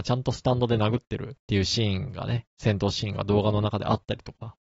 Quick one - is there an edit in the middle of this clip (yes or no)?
yes